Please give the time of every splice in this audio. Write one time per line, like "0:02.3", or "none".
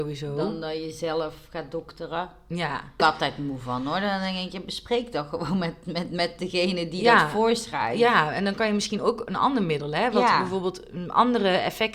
0:03.0